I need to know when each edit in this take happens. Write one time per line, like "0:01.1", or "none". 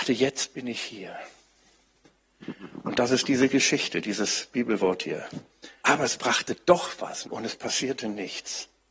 0:05.8
0:07.2

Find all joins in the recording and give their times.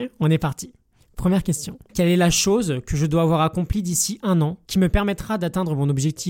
0:01.9
0:04.6

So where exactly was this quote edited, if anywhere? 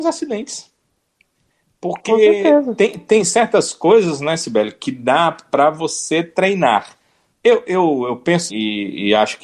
0:07.3
0:08.5

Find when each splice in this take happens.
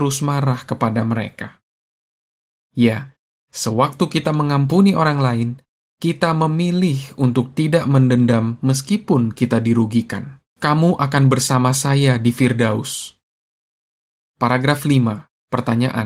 0:10.5

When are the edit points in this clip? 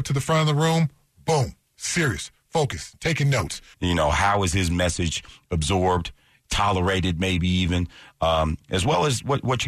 0:03.7

